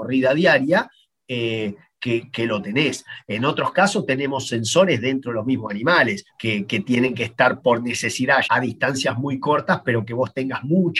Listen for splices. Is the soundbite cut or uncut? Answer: cut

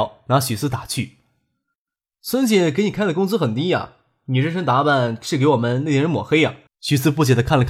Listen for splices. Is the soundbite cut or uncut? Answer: cut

